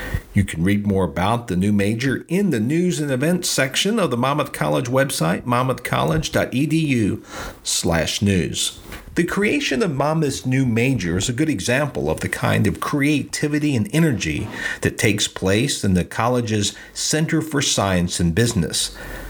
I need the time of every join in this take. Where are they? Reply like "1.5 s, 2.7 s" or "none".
none